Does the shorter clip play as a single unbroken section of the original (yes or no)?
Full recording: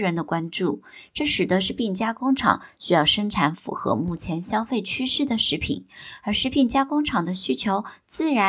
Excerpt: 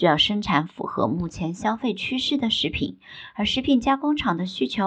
yes